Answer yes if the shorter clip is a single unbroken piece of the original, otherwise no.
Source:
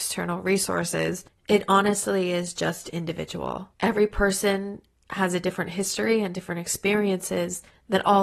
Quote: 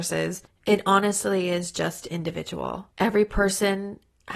yes